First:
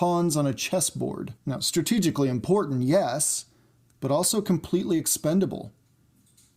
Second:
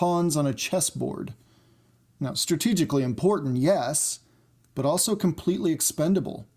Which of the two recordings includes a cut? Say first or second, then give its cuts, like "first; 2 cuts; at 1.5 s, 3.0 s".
first; 1 cut; at 1.4 s